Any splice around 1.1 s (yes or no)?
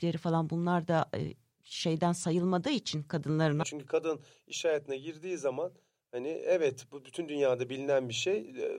no